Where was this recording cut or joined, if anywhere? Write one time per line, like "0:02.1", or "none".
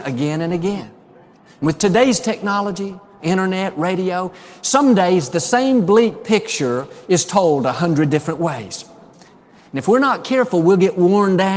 0:03.2
0:09.3